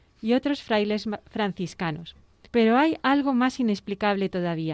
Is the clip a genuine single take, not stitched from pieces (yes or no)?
no